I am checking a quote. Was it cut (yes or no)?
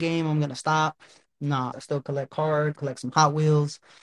yes